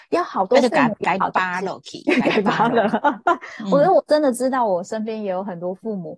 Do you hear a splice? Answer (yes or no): no